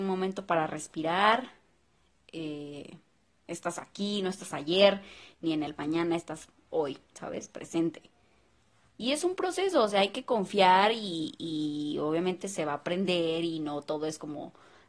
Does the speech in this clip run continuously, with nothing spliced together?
yes; 0 cuts

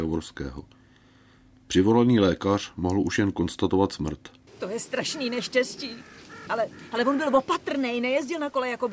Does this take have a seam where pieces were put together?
yes; 2 cuts; at 4.5 s, 6.5 s

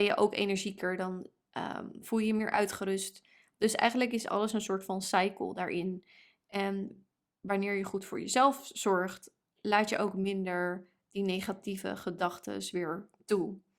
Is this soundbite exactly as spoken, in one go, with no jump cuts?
yes; 0 cuts

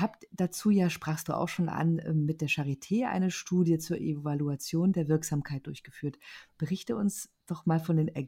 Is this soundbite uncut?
yes; 0 cuts

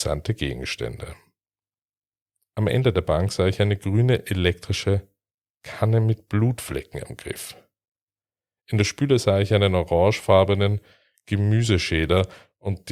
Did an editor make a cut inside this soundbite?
no; 0 cuts

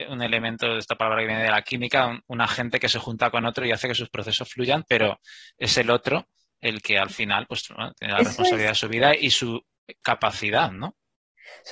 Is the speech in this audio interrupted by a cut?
no; 0 cuts

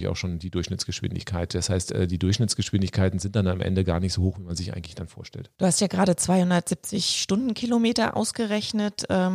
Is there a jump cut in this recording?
no; 0 cuts

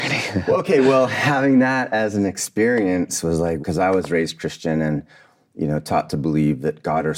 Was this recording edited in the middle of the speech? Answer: yes; 1 cut; at 3.6 s

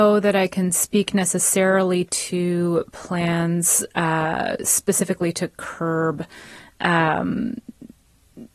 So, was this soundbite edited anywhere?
no; 0 cuts

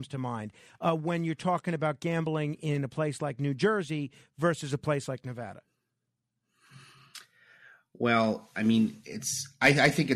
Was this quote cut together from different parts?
no; 0 cuts

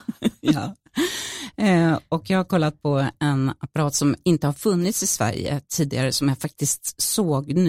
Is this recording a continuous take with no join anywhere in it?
yes; 0 cuts

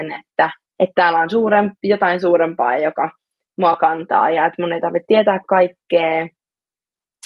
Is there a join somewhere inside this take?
no; 0 cuts

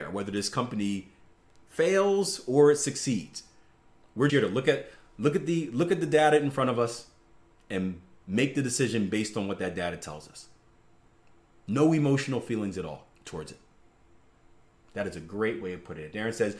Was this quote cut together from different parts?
yes; 2 cuts; at 4.3 s, 13.1 s

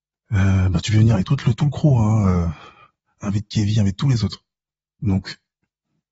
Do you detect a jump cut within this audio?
no; 0 cuts

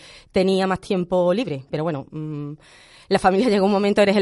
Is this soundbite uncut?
no; 1 cut; at 1.7 s

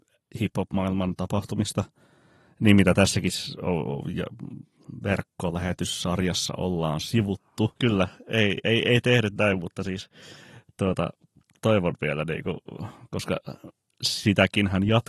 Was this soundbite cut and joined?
yes; 2 cuts; at 7.8 s, 11.6 s

